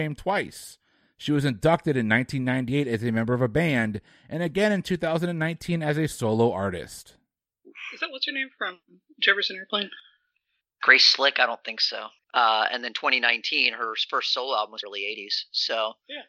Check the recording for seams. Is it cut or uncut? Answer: cut